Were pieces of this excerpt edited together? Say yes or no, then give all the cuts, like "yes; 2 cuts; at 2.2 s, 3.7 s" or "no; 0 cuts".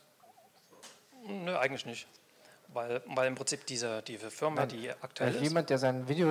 no; 0 cuts